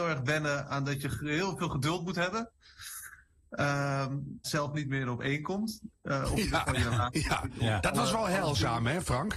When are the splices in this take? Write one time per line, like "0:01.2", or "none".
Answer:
0:04.4